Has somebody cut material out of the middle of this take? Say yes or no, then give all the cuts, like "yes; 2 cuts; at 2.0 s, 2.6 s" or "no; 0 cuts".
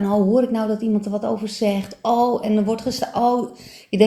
no; 0 cuts